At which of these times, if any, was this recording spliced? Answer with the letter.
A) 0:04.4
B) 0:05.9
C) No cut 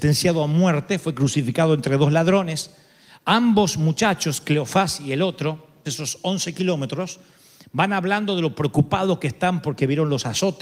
B